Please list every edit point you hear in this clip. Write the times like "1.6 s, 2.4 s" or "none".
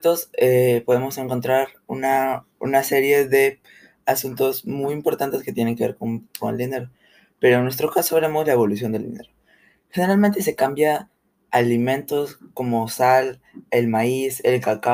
none